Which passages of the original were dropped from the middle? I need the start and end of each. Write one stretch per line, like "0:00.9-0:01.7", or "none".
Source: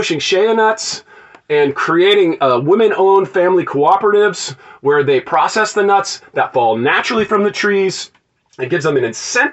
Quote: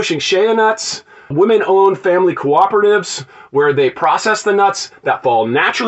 0:01.3-0:02.6